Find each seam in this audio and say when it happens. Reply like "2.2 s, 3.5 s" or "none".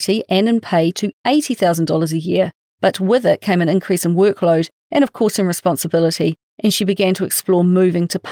none